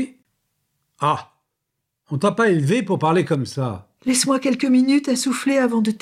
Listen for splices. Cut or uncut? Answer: cut